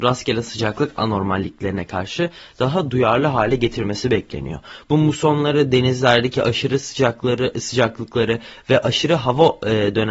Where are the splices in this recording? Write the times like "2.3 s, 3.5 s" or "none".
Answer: 4.8 s